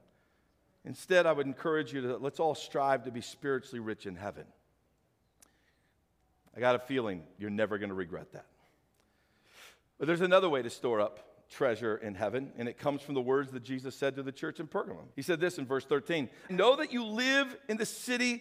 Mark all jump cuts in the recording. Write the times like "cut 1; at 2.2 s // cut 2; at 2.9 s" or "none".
cut 1; at 15.1 s // cut 2; at 16.5 s